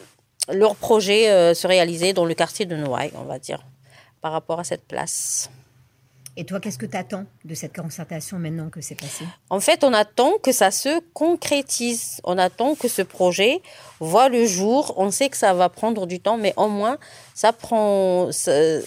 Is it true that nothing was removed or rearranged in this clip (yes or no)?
yes